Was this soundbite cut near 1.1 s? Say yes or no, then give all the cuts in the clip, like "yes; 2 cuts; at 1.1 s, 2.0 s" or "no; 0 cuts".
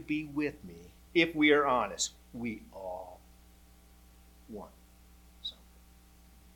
yes; 1 cut; at 1.1 s